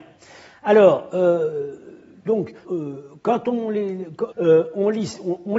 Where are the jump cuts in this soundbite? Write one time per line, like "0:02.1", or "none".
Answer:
0:02.6
0:04.3